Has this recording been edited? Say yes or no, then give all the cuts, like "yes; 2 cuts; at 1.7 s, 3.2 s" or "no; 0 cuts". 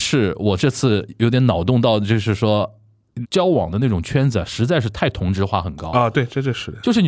yes; 1 cut; at 3.2 s